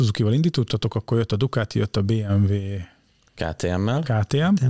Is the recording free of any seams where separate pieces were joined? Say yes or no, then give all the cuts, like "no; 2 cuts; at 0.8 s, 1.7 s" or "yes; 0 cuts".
yes; 0 cuts